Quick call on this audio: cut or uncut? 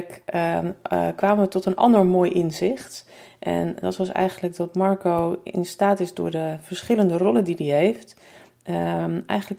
uncut